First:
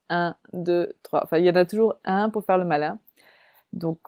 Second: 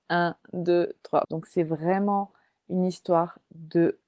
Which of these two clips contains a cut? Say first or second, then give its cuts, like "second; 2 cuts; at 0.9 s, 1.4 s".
second; 1 cut; at 1.2 s